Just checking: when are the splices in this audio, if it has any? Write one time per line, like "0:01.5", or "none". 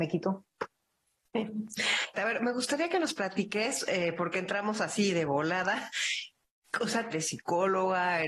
0:02.1
0:07.1